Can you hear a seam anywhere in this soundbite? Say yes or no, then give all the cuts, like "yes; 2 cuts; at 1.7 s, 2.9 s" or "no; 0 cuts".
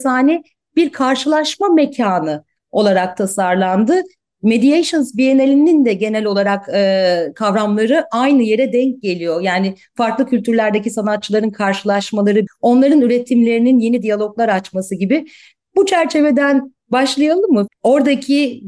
yes; 2 cuts; at 12.5 s, 17.7 s